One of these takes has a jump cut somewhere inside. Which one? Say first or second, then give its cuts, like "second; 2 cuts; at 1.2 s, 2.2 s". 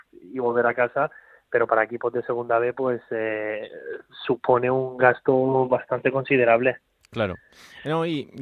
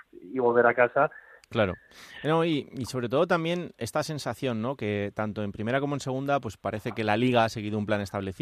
second; 1 cut; at 1.4 s